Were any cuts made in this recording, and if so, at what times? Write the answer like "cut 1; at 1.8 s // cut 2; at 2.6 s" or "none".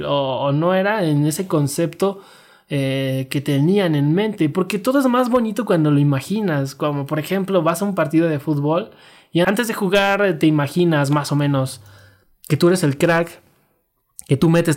none